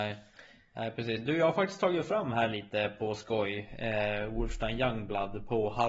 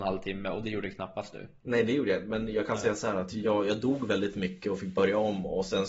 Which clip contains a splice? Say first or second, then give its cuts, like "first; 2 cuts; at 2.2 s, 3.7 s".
second; 1 cut; at 1.6 s